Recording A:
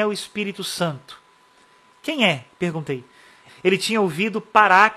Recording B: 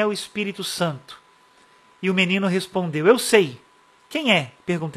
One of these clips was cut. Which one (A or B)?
A